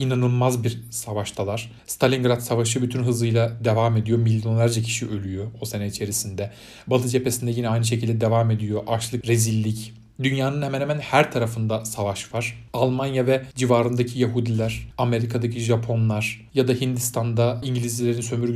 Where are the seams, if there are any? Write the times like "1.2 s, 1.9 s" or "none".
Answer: 9.2 s